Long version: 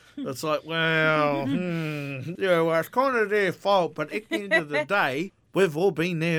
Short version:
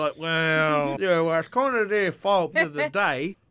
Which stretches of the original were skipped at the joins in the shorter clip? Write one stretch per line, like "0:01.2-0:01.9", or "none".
0:01.4-0:02.4
0:03.9-0:04.5